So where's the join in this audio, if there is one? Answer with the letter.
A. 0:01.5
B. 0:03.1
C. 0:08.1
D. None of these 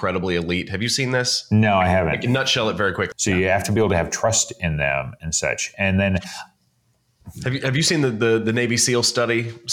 B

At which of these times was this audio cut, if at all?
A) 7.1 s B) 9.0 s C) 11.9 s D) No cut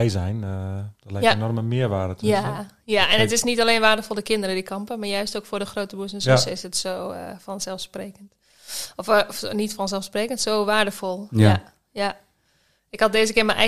D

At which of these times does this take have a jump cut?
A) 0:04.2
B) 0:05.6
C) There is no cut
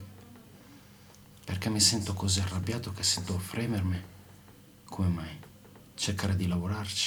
C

